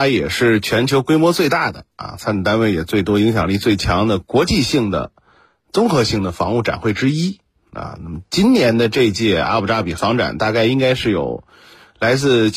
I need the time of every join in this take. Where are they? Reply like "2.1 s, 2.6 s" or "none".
none